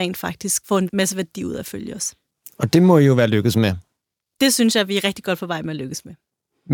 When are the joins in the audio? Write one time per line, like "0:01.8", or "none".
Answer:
none

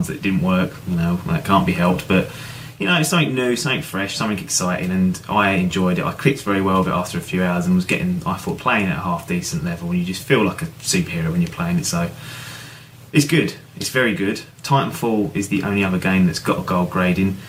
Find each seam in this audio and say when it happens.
0:08.6
0:14.5

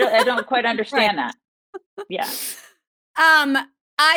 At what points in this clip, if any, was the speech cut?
none

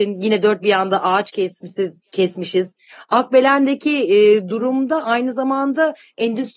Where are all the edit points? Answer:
none

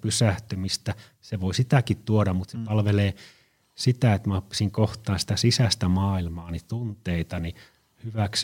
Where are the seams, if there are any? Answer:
none

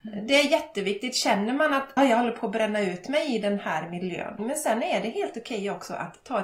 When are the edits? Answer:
0:02.0
0:04.4

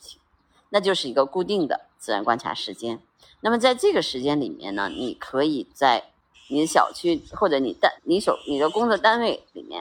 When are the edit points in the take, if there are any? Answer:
0:06.3
0:08.0

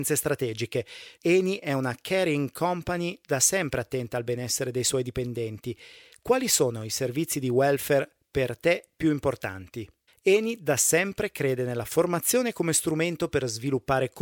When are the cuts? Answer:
0:01.2
0:10.1

